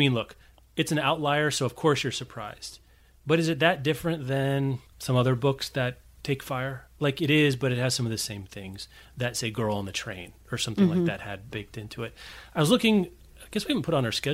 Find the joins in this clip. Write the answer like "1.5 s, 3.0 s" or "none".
4.9 s, 11.5 s